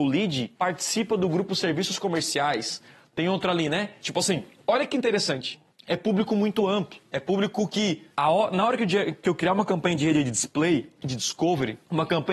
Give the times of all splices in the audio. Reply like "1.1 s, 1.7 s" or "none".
4.0 s